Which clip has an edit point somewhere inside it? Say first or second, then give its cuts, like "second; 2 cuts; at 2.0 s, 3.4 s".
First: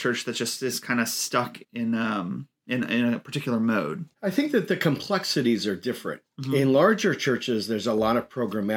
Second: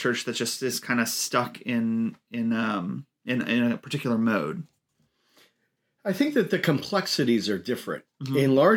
first; 2 cuts; at 1.6 s, 4.1 s